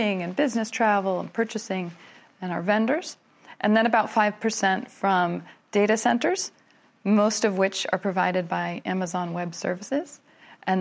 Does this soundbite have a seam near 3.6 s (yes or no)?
no